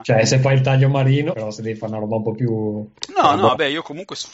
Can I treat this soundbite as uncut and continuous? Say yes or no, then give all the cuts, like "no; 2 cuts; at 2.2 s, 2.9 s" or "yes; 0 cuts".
no; 1 cut; at 1.3 s